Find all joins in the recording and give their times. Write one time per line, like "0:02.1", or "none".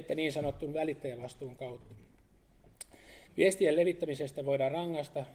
0:03.3